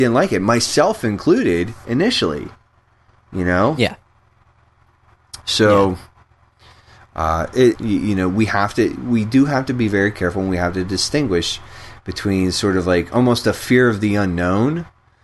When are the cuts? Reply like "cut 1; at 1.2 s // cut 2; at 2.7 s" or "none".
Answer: cut 1; at 7.7 s